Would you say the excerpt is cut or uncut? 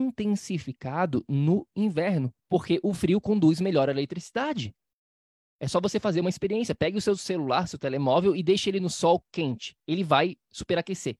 cut